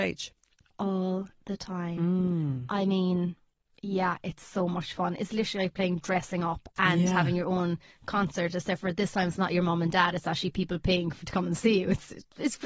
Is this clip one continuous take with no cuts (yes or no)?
yes